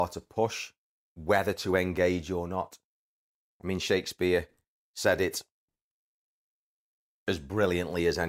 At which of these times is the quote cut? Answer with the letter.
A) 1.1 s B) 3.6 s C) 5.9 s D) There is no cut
A